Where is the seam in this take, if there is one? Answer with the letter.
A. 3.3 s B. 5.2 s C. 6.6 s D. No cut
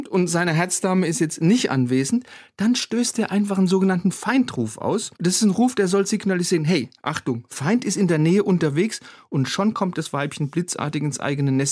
B